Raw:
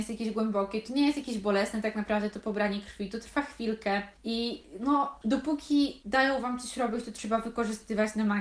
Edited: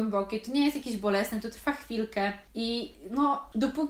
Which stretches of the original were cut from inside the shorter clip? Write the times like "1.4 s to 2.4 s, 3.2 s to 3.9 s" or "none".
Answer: 1.8 s to 3.1 s